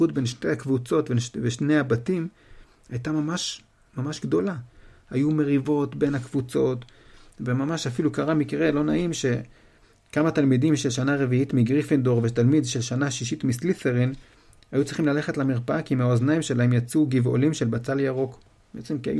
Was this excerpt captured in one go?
yes; 0 cuts

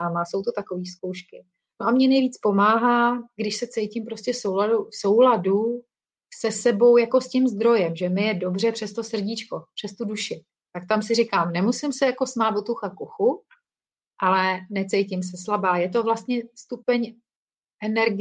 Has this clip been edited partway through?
no; 0 cuts

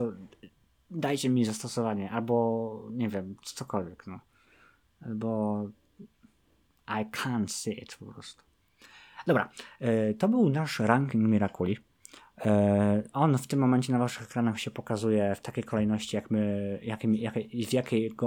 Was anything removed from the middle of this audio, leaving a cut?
no; 0 cuts

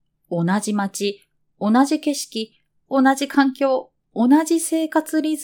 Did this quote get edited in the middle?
yes; 1 cut; at 2.9 s

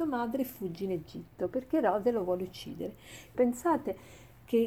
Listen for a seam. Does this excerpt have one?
yes; 1 cut; at 3.3 s

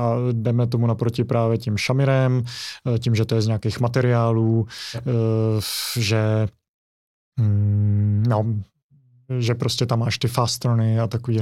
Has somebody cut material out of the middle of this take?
no; 0 cuts

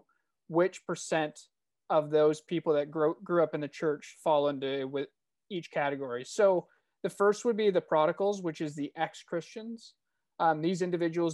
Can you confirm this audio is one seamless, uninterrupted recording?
yes; 0 cuts

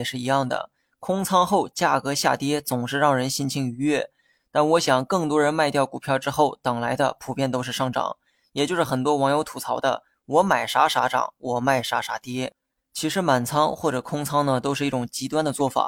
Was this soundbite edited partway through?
no; 0 cuts

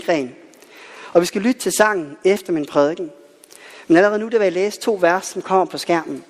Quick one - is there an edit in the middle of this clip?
no; 0 cuts

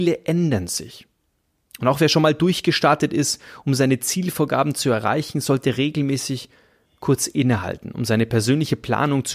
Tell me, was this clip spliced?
no; 0 cuts

